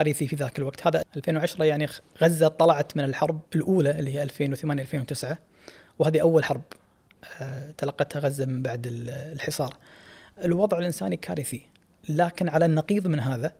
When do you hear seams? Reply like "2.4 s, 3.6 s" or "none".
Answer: 1.0 s, 3.5 s